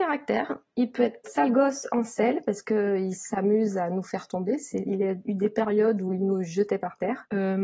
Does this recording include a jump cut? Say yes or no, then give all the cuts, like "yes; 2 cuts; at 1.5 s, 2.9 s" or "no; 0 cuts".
yes; 1 cut; at 1.2 s